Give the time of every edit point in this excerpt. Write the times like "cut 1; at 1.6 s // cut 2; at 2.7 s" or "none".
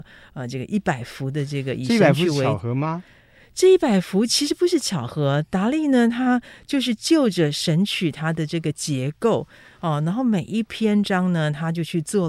none